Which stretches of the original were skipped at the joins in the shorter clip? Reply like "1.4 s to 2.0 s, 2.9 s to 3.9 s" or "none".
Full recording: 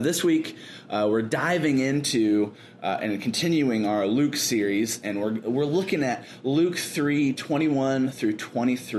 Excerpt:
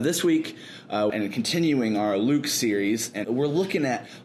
1.1 s to 3.0 s, 5.1 s to 5.4 s